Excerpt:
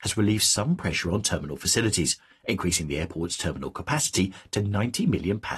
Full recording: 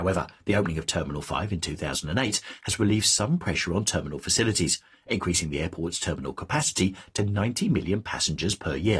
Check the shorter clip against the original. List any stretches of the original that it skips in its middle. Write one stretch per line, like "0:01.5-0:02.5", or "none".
none